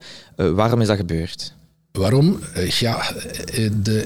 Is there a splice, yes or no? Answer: no